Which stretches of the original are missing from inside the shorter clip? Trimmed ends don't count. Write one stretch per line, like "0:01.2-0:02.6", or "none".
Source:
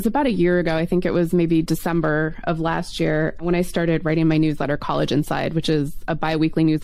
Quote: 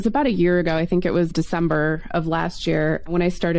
0:01.3-0:01.6